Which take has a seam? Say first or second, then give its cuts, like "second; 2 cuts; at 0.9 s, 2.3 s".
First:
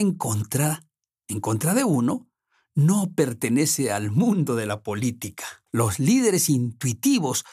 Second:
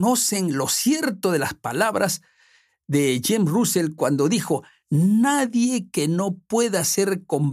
first; 1 cut; at 5.7 s